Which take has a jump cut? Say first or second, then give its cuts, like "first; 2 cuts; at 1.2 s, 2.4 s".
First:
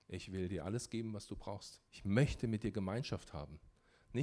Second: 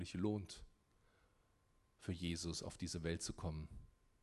first; 1 cut; at 1.9 s